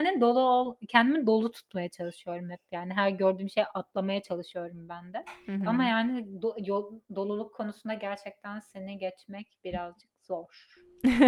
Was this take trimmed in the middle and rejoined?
no; 0 cuts

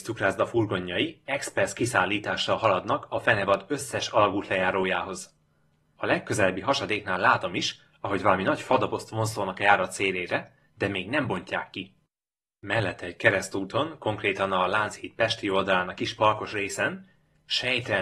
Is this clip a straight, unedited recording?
yes; 0 cuts

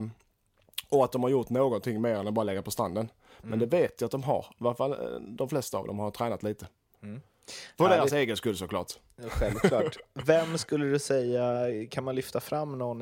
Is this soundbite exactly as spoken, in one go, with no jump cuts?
yes; 0 cuts

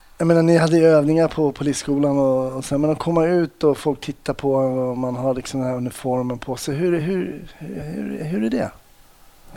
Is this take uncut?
yes; 0 cuts

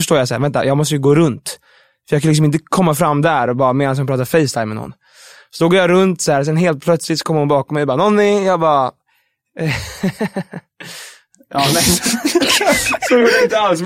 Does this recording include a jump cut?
no; 0 cuts

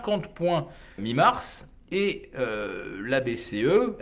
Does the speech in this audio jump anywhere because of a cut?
yes; 1 cut; at 1.0 s

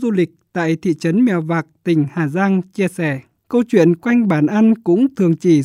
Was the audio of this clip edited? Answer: yes; 1 cut; at 3.4 s

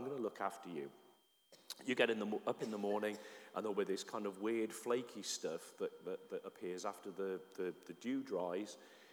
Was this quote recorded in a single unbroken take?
yes; 0 cuts

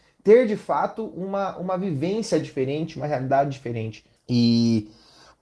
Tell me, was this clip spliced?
yes; 1 cut; at 4.2 s

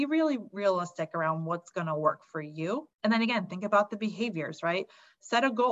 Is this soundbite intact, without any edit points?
no; 1 cut; at 2.9 s

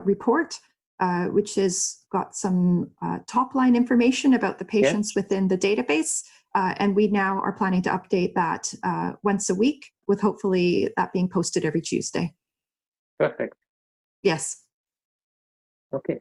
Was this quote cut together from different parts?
yes; 2 cuts; at 10.0 s, 14.0 s

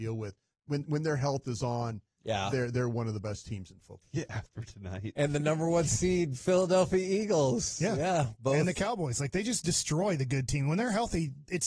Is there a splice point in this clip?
yes; 1 cut; at 4.0 s

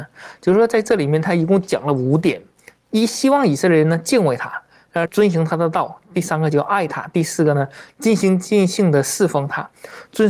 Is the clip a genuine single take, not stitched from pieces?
no; 1 cut; at 5.1 s

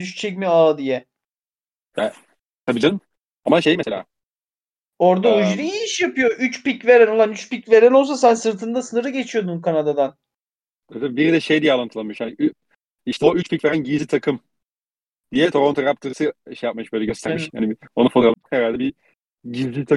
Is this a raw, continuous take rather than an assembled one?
no; 1 cut; at 18.4 s

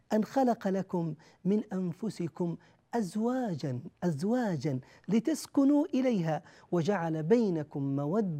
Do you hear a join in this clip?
yes; 1 cut; at 3.9 s

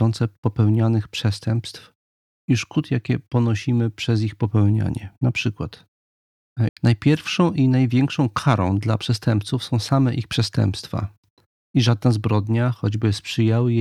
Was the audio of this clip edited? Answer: yes; 1 cut; at 6.7 s

